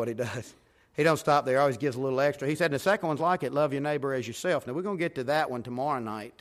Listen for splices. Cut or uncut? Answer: uncut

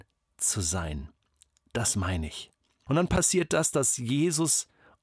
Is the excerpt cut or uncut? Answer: cut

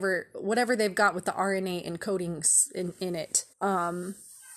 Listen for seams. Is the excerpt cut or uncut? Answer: cut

